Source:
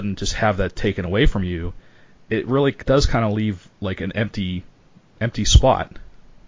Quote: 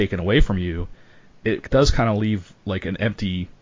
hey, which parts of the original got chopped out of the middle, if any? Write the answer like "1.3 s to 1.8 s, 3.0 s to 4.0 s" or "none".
2.4 s to 2.7 s